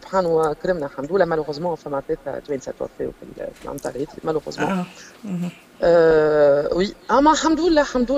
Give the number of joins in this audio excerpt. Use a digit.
0